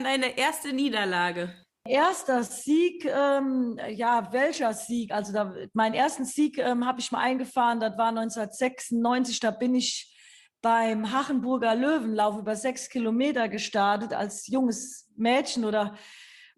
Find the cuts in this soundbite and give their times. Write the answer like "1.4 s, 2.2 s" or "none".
none

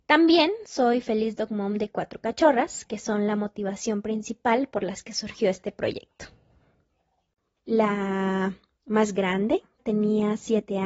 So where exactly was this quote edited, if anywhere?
7.6 s, 9.8 s

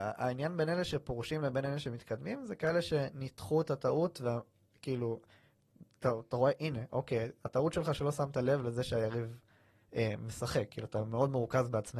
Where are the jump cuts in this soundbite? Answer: none

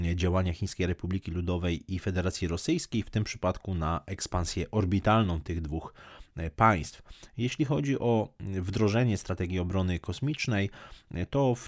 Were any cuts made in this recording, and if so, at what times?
none

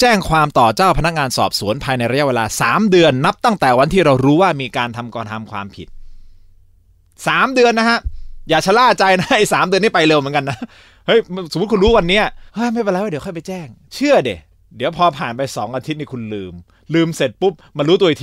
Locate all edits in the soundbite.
12.5 s

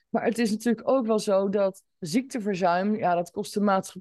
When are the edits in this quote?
1.9 s

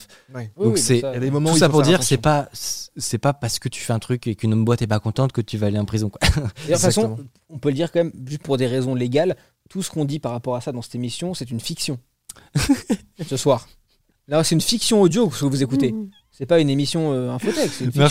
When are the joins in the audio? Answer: none

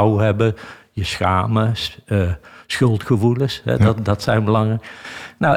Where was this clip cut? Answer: none

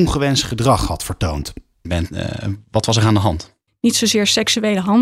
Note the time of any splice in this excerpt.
1.8 s, 3.7 s

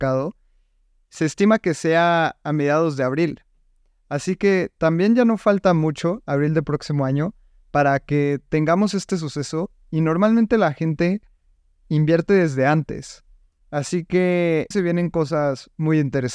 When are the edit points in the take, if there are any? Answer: 14.7 s

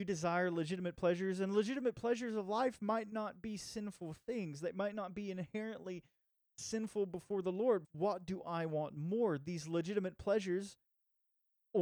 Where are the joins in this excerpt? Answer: 7.8 s

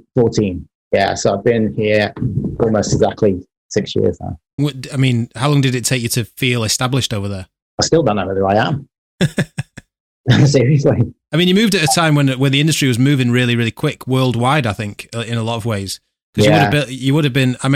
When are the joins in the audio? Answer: 4.6 s

